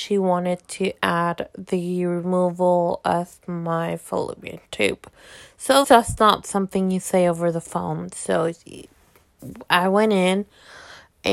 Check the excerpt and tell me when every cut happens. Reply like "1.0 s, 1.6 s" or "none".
5.8 s